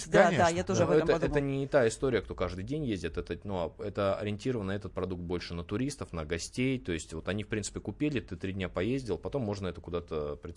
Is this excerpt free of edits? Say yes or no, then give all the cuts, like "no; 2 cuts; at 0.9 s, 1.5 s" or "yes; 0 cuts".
no; 1 cut; at 2.2 s